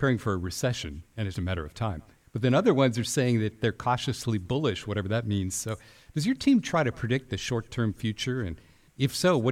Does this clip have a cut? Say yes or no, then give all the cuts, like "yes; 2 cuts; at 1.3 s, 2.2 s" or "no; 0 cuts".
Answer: yes; 1 cut; at 1.3 s